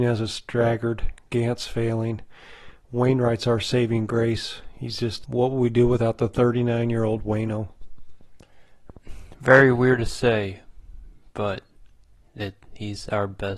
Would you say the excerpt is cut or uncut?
cut